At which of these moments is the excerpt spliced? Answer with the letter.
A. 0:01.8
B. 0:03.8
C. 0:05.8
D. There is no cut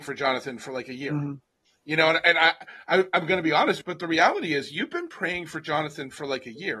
B